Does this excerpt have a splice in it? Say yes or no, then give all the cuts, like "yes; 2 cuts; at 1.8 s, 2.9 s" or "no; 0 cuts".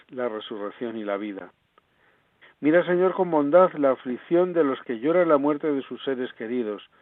yes; 1 cut; at 2.4 s